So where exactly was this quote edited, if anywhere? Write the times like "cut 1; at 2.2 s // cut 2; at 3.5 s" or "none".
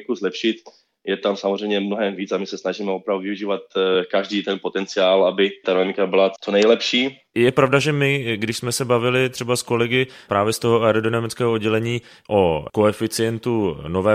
none